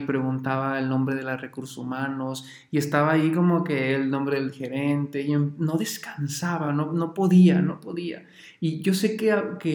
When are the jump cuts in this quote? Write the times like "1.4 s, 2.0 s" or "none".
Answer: none